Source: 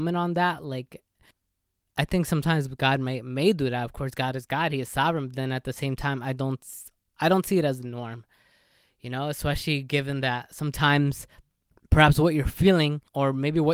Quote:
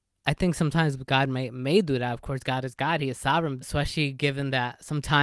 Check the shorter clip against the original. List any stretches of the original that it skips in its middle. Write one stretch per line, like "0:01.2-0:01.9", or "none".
0:05.3-0:09.3